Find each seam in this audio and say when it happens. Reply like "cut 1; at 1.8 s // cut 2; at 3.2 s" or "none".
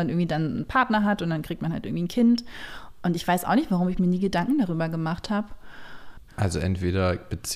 cut 1; at 6.3 s